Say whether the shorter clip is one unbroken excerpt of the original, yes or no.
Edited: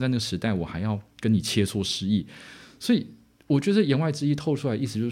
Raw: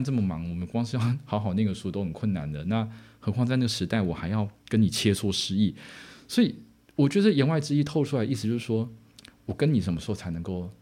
yes